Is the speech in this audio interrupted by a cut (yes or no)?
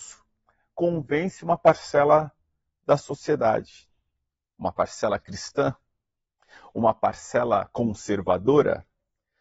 no